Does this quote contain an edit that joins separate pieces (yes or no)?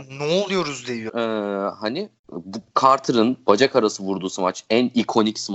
yes